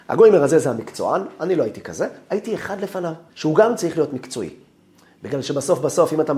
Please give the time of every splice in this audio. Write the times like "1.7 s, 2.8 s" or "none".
3.3 s